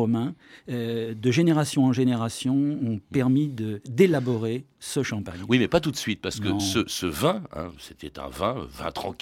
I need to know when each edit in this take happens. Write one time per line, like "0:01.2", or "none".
none